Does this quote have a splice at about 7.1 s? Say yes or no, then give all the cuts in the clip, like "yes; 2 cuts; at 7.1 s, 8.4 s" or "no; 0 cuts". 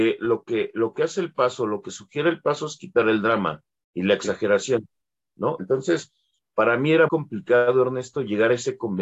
yes; 2 cuts; at 5.6 s, 7.1 s